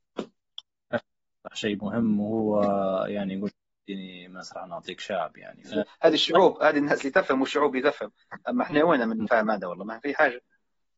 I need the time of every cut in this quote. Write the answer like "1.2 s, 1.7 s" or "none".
5.7 s